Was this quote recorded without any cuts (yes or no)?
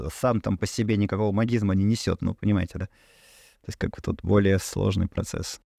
yes